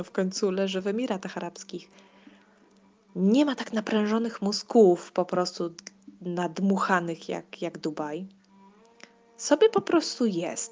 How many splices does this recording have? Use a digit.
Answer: 0